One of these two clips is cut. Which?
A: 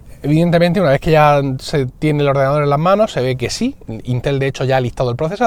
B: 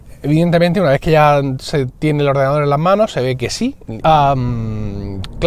B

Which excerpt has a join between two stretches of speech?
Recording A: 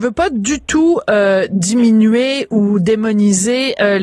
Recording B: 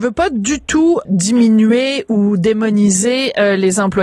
B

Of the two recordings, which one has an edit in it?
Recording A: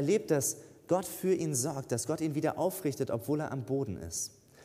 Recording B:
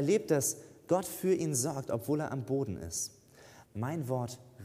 B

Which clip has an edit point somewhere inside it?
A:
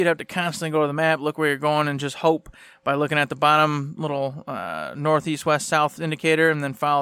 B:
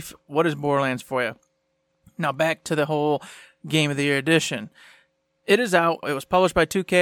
B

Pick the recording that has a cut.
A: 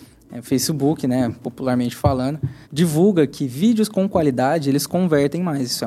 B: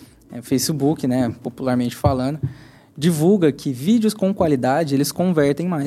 A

